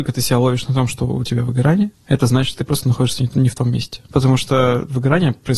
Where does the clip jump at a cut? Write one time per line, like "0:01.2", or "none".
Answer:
none